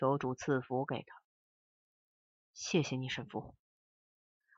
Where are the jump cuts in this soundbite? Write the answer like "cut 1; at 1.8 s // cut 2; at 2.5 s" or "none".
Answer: none